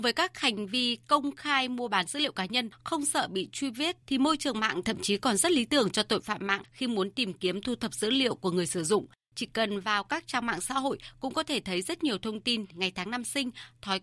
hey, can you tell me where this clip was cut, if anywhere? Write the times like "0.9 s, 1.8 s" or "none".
4.0 s, 12.7 s